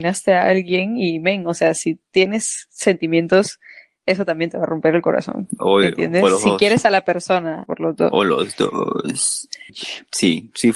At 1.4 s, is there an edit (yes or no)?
no